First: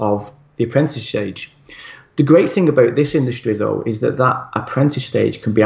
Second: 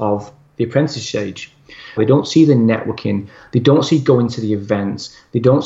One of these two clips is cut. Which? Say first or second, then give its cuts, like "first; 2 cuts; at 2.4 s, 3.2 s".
second; 1 cut; at 2.0 s